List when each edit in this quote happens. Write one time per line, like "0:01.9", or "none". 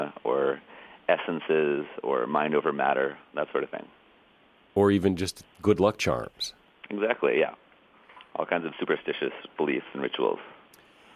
none